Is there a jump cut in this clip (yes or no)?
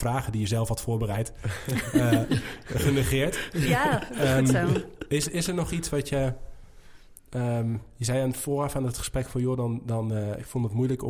no